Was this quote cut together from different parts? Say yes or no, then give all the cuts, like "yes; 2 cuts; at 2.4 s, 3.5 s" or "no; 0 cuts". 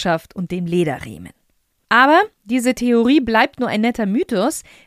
yes; 1 cut; at 1.7 s